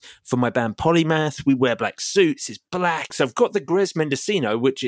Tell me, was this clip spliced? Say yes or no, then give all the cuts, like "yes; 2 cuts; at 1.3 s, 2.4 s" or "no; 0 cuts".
yes; 1 cut; at 3.1 s